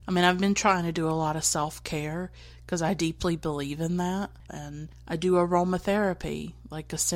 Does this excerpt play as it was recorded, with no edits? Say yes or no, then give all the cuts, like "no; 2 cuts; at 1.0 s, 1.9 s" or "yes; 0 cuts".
no; 1 cut; at 4.5 s